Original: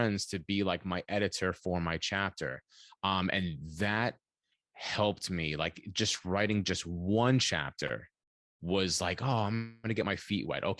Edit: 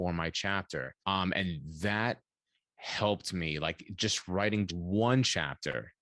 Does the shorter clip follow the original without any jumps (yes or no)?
no